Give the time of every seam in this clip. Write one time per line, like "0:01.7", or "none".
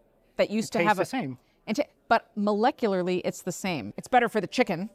0:03.9